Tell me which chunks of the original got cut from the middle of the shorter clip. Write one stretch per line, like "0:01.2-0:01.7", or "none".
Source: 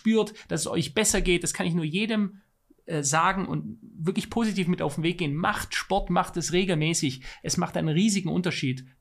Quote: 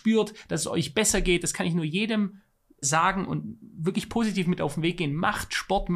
0:02.8-0:03.0